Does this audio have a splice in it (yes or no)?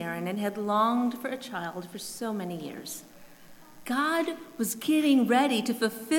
yes